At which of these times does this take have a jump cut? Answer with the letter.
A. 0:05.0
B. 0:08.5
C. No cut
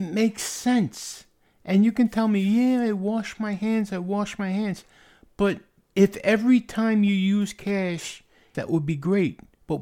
B